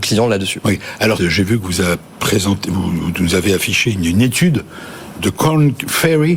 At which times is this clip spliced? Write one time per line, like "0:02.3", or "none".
0:01.2